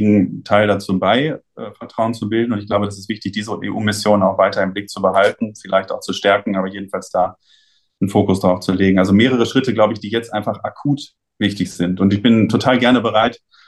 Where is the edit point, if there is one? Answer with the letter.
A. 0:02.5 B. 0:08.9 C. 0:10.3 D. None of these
D